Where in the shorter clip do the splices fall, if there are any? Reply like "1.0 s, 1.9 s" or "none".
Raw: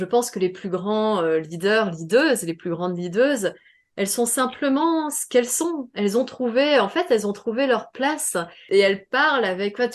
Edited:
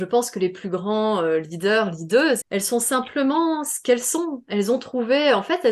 2.4 s